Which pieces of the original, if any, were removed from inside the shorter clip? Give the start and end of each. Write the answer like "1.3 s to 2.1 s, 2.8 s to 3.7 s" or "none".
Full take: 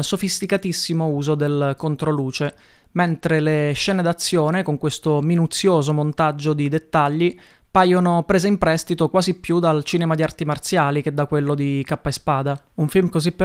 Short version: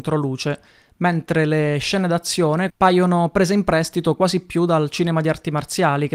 4.6 s to 7.6 s

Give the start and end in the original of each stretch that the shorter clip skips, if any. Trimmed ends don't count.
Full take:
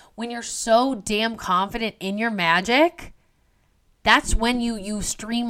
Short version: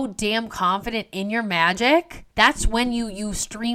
3.2 s to 4.0 s

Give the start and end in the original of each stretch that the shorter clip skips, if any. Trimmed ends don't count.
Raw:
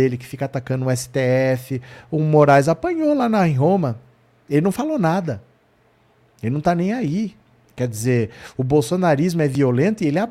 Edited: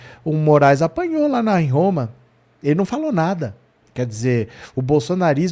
5.7 s to 7.6 s

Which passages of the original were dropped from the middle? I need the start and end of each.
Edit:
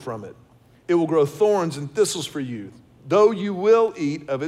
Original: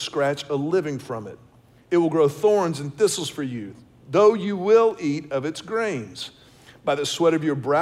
none

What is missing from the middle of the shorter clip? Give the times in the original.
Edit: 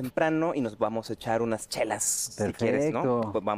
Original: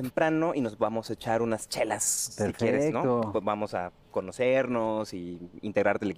none

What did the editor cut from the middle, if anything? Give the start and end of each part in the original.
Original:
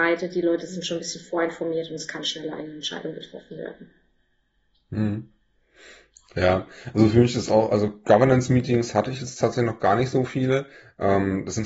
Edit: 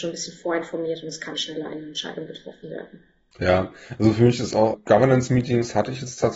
4.2 s to 6.3 s, 7.7 s to 7.9 s

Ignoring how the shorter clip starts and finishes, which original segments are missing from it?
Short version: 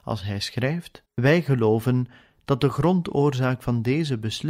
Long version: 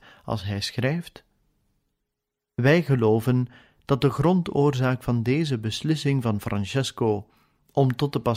1.3 s to 2.5 s

